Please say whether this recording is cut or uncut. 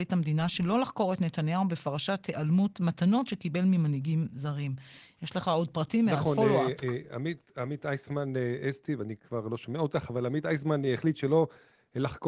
uncut